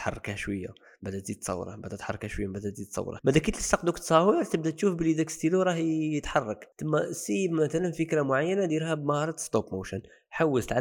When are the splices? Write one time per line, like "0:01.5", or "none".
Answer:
0:03.2
0:06.7

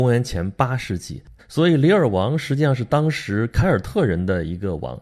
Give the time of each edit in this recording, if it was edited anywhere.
0:01.4

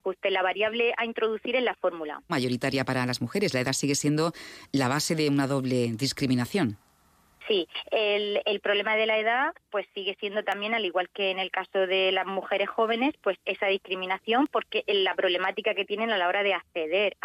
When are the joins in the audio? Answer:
0:02.3

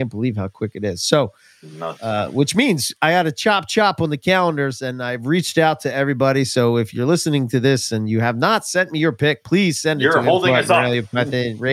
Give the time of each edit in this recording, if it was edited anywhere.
none

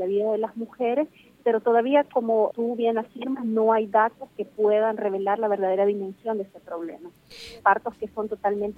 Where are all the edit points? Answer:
0:02.5
0:07.6

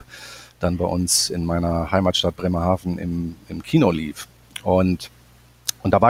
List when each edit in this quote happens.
none

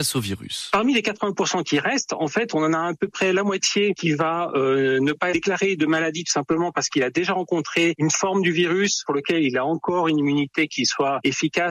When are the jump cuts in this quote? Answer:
none

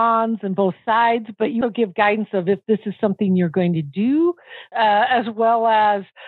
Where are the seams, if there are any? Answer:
0:01.6
0:04.7

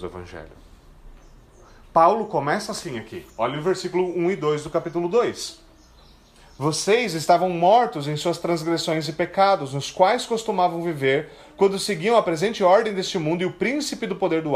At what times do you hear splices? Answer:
none

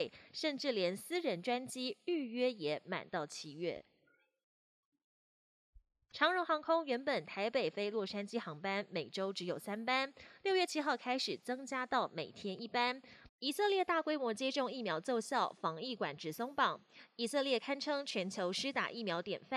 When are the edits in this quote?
0:06.1
0:13.3

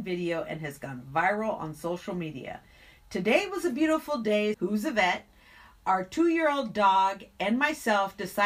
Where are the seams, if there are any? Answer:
0:04.5

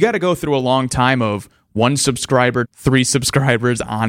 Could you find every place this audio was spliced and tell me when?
0:02.6

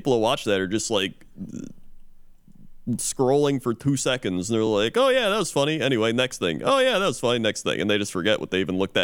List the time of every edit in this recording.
none

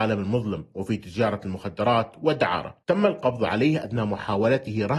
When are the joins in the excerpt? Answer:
0:02.8

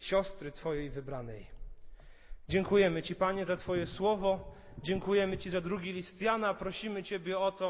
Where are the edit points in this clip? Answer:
none

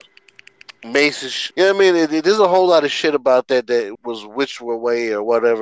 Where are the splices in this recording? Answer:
0:01.5
0:04.0

